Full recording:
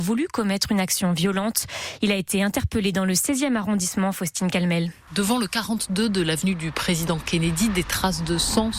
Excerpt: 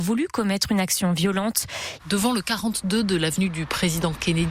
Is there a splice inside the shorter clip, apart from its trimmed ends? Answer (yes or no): yes